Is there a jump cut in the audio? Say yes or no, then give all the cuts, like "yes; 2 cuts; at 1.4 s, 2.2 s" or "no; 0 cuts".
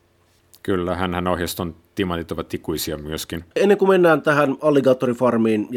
yes; 1 cut; at 3.5 s